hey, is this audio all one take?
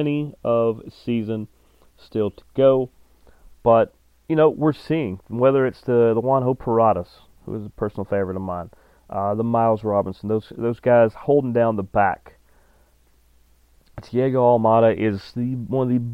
yes; 0 cuts

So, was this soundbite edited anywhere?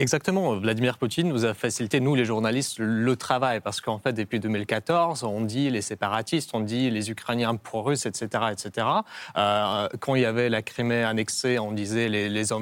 no; 0 cuts

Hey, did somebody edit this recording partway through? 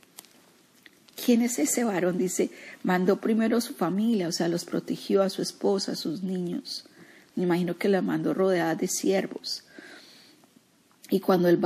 no; 0 cuts

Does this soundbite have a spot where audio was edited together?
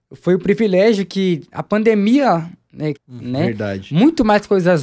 yes; 1 cut; at 3.0 s

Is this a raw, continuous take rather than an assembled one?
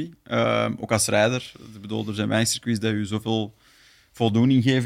yes; 0 cuts

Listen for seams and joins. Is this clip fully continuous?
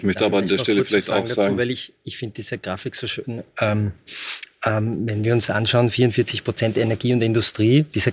yes; 0 cuts

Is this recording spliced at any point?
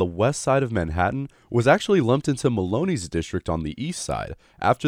no; 0 cuts

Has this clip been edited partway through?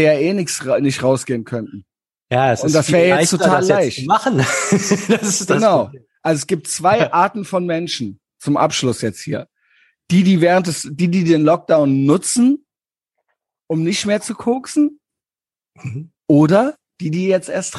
yes; 1 cut; at 16.1 s

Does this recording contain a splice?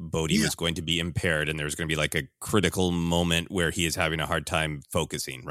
no; 0 cuts

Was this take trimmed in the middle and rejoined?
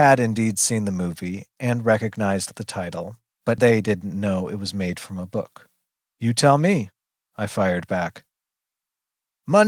yes; 2 cuts; at 3.6 s, 6.0 s

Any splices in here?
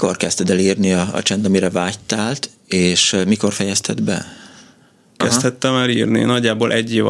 yes; 1 cut; at 5.2 s

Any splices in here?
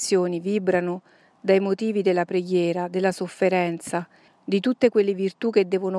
yes; 1 cut; at 4.3 s

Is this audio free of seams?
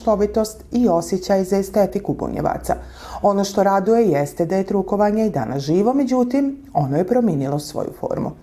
yes; 0 cuts

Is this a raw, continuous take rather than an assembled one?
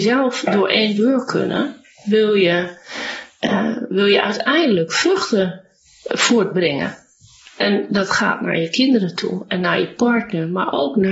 yes; 0 cuts

